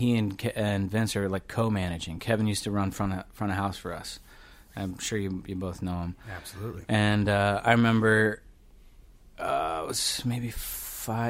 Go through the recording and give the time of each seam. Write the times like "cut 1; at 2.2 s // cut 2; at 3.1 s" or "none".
none